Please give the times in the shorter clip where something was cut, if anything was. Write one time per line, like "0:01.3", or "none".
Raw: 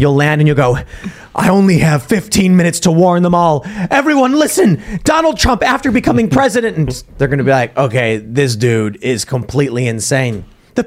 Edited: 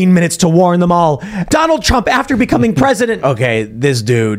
0:01.5
0:03.2